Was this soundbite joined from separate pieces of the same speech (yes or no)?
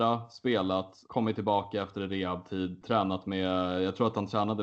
yes